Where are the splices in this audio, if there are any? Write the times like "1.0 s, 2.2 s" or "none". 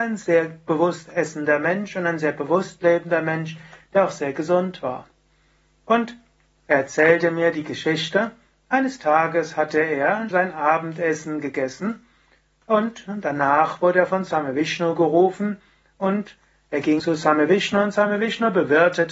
10.3 s, 17.0 s

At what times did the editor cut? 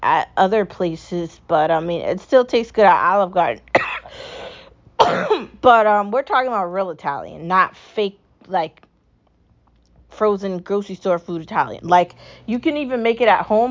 11.8 s

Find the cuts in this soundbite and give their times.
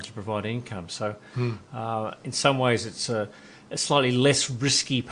none

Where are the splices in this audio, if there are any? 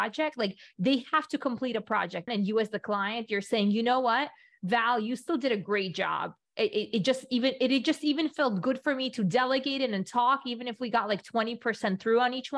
2.3 s

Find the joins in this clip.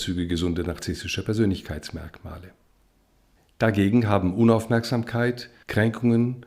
none

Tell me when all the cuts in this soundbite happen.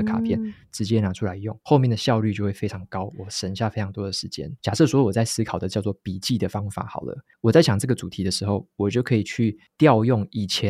4.6 s

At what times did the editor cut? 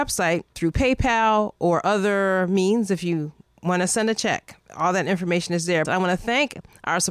5.8 s

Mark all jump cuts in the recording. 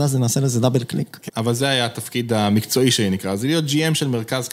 1.3 s

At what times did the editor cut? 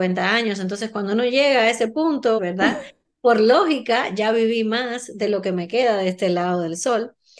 2.4 s

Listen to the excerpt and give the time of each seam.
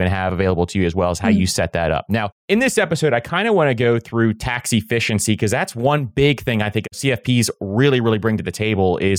none

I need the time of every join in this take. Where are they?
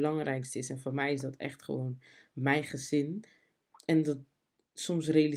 none

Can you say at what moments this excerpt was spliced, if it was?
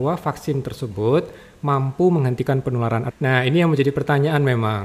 3.1 s

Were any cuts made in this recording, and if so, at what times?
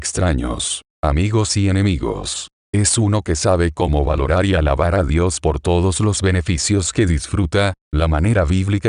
2.6 s, 7.8 s

